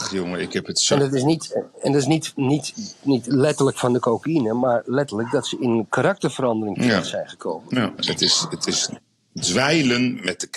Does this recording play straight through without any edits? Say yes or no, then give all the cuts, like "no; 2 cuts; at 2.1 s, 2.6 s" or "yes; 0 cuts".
no; 1 cut; at 8.0 s